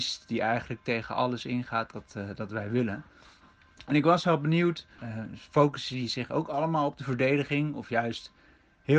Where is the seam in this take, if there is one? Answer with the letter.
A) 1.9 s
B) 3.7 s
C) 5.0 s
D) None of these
C